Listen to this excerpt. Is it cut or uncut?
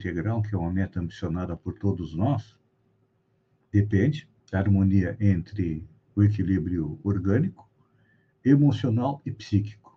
cut